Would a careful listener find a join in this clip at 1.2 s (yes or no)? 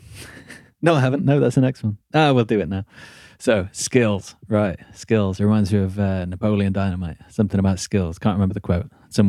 no